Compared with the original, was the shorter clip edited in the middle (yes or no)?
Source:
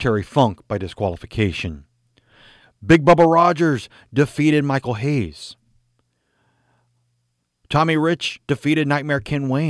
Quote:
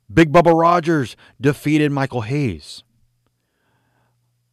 no